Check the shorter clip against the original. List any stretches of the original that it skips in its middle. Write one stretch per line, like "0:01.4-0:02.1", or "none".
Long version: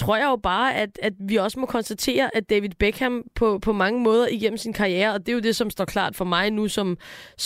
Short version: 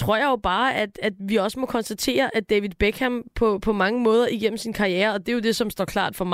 none